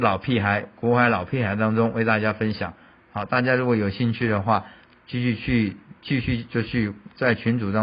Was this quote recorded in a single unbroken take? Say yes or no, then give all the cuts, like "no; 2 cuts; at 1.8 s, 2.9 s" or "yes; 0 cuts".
yes; 0 cuts